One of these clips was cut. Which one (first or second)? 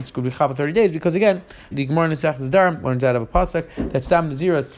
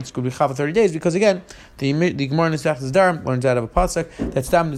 first